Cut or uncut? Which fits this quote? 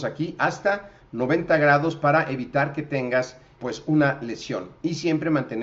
cut